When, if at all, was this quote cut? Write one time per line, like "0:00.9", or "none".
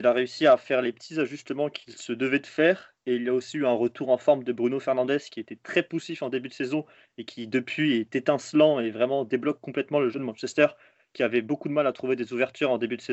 none